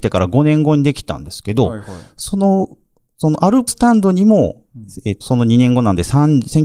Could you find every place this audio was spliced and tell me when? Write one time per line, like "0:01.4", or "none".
0:03.7
0:05.2